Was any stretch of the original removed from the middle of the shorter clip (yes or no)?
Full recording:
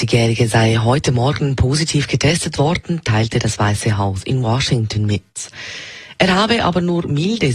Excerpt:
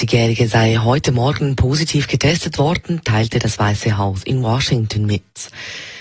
no